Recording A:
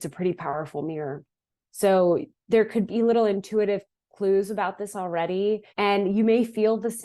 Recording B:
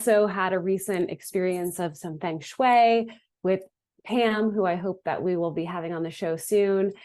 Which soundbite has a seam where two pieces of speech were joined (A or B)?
A